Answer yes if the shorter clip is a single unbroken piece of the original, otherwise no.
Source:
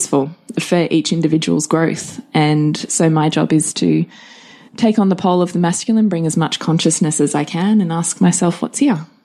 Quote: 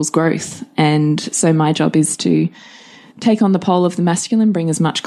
yes